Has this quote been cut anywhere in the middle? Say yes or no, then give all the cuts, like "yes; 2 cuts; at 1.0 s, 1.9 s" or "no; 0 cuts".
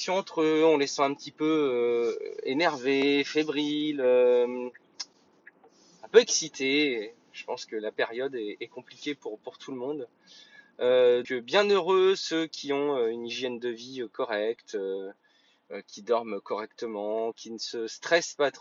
yes; 2 cuts; at 11.2 s, 17.3 s